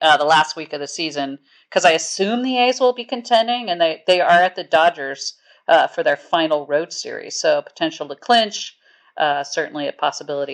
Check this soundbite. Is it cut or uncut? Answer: uncut